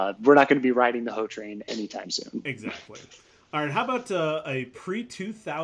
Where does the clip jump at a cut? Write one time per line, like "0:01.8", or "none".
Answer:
none

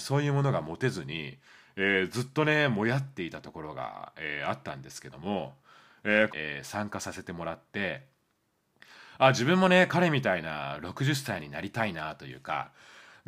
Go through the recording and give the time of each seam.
0:06.3

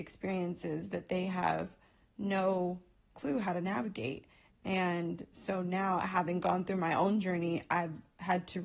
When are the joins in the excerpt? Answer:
0:04.5

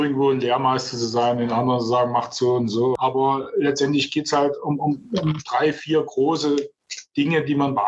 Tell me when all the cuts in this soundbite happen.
none

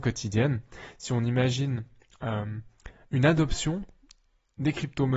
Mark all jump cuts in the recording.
none

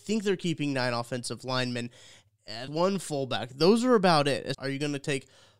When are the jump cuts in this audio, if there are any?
0:02.7
0:04.5

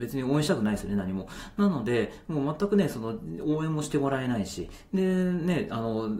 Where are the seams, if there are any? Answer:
none

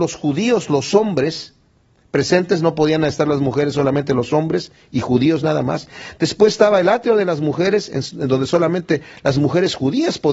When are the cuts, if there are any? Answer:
none

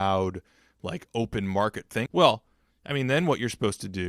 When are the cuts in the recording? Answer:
0:02.1

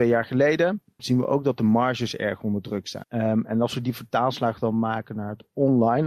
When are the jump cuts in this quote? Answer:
0:01.0
0:03.0

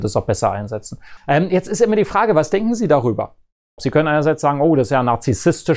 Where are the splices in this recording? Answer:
0:01.2
0:03.8

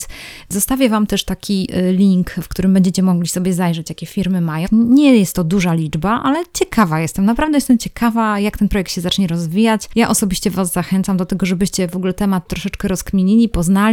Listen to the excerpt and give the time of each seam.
0:04.6

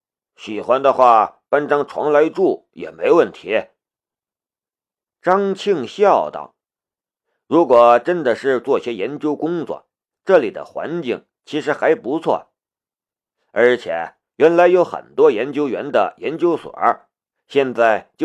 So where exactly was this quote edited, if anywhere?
none

